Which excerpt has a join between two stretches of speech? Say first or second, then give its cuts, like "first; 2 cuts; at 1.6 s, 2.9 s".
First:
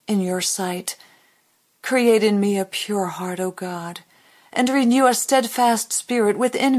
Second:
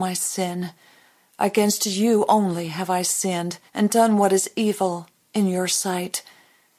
second; 2 cuts; at 1.2 s, 3.7 s